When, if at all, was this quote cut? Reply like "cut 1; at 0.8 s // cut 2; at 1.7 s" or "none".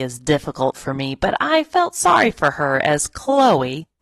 none